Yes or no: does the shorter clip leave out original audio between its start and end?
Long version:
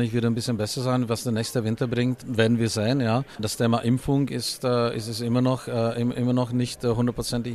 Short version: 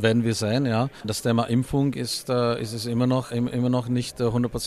yes